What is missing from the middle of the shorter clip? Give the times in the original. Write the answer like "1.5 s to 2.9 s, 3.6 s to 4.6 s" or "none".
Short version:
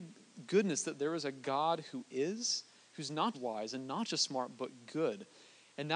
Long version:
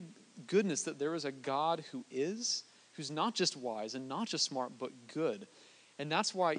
3.3 s to 3.5 s